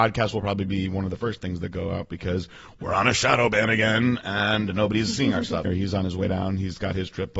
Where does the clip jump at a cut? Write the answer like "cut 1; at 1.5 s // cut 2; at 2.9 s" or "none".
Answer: cut 1; at 5.6 s